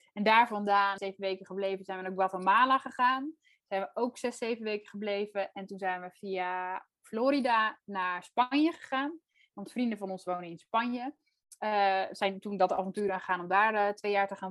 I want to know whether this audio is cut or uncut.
cut